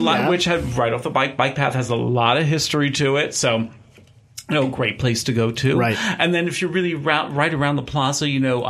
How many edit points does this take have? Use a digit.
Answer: 0